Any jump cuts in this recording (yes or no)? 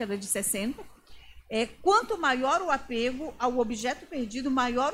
no